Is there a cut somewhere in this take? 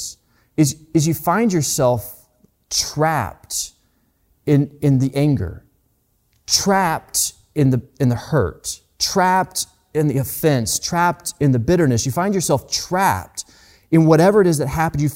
no; 0 cuts

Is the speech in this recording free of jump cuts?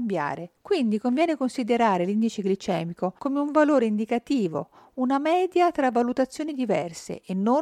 yes; 0 cuts

